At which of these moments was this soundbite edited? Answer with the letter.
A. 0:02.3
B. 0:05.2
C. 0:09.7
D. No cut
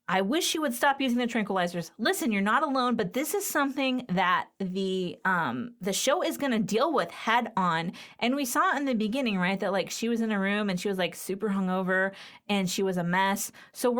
D